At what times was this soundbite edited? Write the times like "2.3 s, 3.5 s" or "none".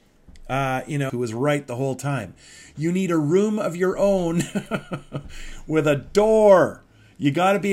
1.1 s